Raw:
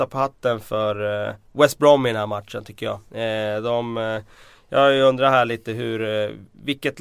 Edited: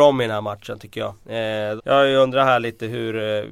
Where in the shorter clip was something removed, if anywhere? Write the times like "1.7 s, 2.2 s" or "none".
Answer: 1.8 s

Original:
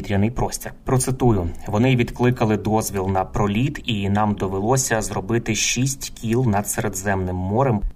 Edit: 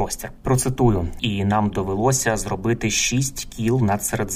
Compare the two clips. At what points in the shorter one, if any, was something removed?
1.2 s

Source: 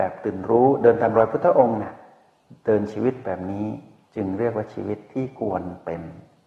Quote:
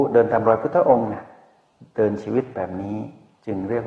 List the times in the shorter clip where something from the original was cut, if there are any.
none

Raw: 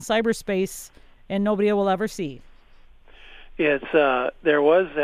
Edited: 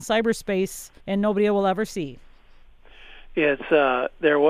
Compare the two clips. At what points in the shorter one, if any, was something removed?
1.0 s

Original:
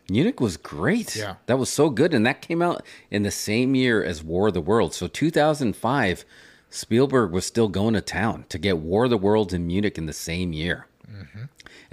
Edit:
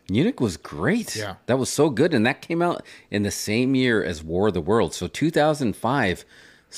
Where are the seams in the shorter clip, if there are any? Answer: none

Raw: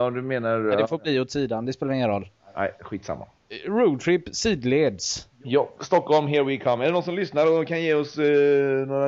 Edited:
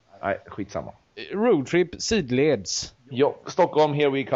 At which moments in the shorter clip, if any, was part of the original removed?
none

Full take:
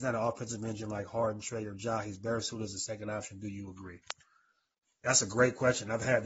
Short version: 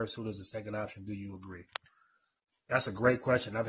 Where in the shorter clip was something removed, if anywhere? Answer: none

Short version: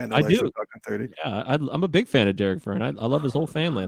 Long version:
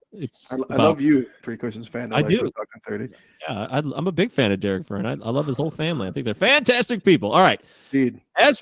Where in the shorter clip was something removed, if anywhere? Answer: 1.1 s

